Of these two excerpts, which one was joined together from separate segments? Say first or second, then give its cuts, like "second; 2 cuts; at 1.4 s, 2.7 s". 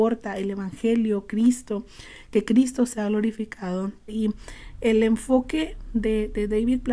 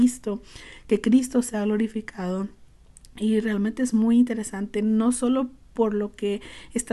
first; 1 cut; at 4.1 s